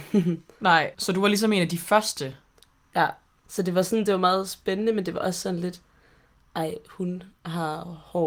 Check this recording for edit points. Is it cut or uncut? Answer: cut